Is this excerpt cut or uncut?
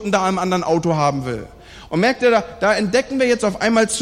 cut